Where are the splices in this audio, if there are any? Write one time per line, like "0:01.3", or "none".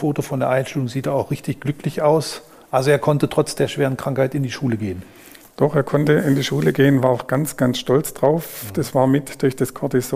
none